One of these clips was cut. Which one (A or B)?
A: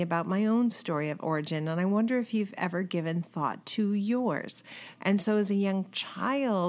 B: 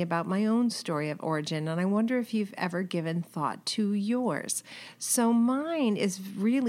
A